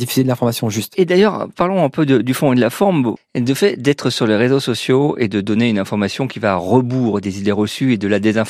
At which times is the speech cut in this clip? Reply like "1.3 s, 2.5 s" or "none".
3.2 s

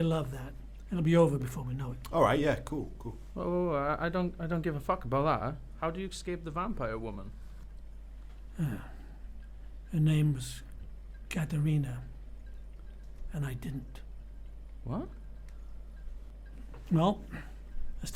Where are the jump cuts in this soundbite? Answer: none

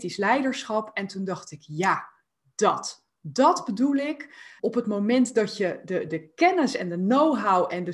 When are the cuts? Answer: 4.6 s, 6.1 s

